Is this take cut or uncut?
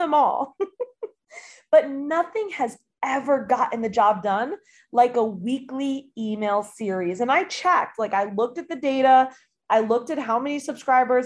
uncut